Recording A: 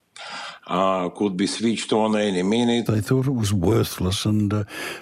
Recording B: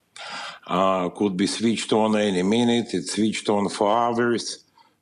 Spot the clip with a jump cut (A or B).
A